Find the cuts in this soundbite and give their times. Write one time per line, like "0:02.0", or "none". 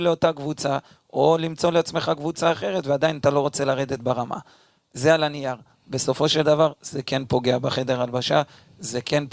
none